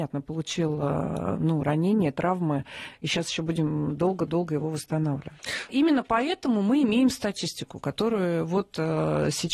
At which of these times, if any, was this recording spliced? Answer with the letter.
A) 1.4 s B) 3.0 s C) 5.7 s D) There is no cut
C